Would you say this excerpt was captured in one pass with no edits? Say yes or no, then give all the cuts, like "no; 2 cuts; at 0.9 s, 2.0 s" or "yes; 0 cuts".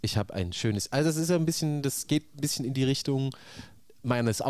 yes; 0 cuts